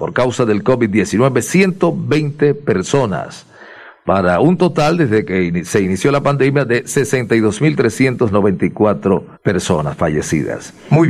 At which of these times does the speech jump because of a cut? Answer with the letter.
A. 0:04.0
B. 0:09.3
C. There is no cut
B